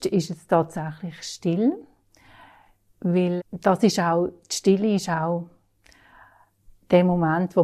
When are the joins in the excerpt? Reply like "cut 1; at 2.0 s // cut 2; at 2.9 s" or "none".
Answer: cut 1; at 3.4 s

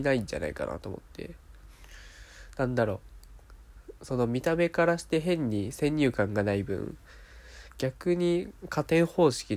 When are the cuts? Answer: none

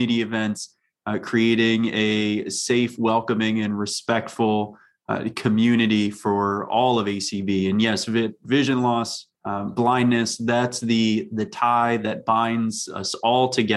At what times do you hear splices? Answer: cut 1; at 9.3 s

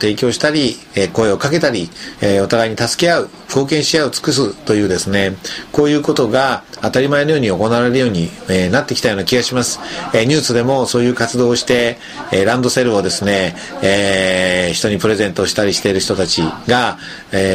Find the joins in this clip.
cut 1; at 2.2 s

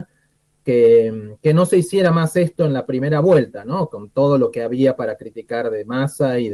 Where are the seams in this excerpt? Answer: none

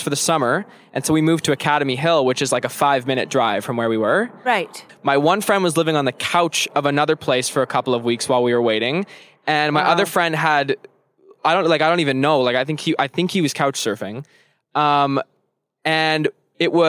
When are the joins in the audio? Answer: cut 1; at 4.9 s

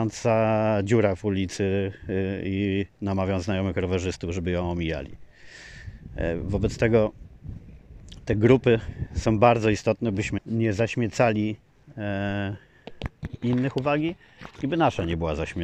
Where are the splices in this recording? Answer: cut 1; at 10.4 s

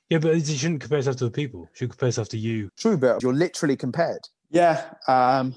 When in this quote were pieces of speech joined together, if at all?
cut 1; at 3.2 s // cut 2; at 4.4 s

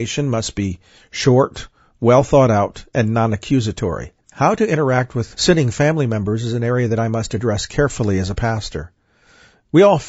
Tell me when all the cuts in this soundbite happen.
cut 1; at 4.2 s

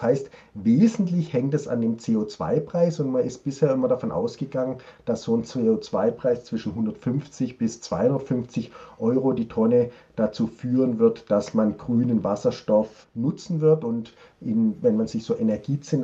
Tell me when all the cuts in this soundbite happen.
none

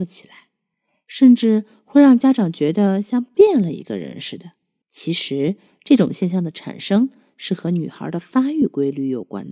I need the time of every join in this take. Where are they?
cut 1; at 4.8 s

